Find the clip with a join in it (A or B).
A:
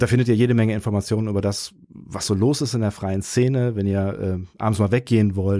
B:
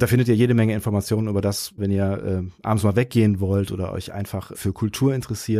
B